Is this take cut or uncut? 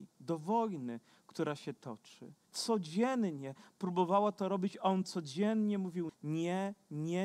cut